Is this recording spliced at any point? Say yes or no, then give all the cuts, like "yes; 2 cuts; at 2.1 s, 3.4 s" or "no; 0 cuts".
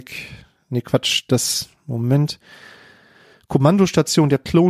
no; 0 cuts